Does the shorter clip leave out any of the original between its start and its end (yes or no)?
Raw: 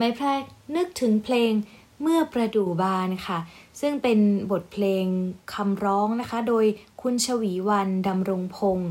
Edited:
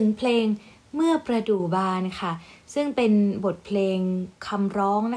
no